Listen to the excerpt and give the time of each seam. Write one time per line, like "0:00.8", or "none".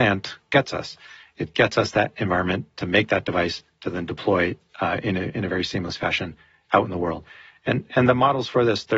none